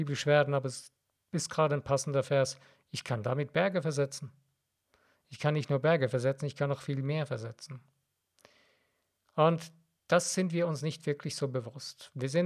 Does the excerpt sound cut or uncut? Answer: uncut